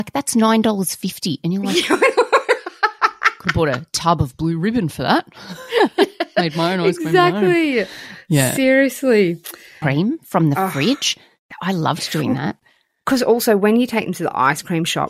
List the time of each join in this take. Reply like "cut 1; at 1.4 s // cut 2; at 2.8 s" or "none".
cut 1; at 9.8 s